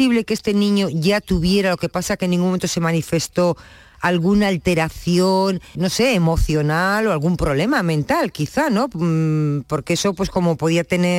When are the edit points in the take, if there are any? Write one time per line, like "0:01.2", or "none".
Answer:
0:05.7